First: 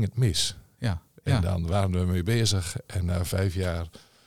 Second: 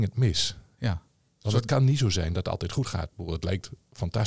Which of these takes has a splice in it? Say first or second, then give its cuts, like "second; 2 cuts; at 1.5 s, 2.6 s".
first; 1 cut; at 1.2 s